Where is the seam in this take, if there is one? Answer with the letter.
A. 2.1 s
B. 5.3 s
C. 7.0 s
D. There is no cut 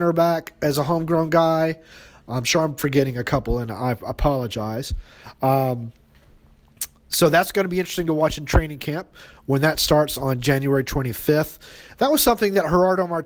D